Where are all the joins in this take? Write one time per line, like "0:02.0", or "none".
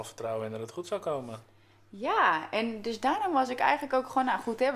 none